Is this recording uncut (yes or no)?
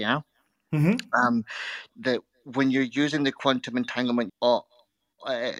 no